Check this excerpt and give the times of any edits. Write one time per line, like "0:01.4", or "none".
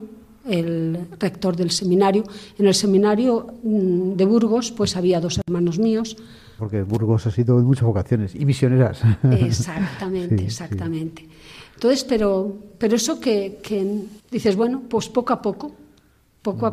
0:06.6
0:14.2